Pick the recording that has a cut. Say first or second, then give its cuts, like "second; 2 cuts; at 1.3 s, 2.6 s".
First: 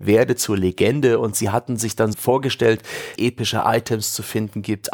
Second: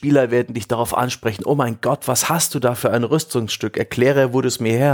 first; 2 cuts; at 2.1 s, 3.2 s